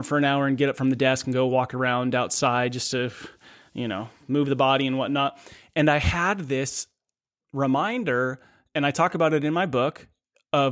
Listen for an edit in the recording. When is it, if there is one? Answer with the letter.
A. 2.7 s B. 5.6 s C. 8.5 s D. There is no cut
D